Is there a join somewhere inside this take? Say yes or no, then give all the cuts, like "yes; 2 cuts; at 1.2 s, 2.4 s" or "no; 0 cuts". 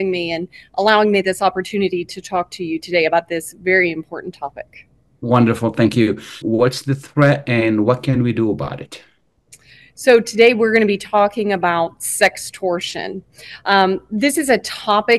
yes; 1 cut; at 6.4 s